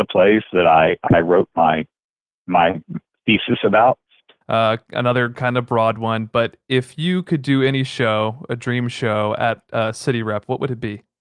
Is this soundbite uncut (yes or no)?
no